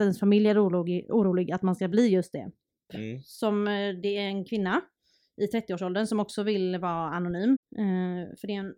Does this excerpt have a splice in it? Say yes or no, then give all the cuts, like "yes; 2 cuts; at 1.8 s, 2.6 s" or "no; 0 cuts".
yes; 2 cuts; at 2.9 s, 7.6 s